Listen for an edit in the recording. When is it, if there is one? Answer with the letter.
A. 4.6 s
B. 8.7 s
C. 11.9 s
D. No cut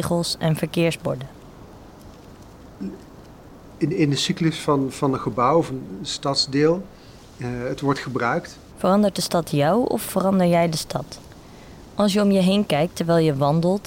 B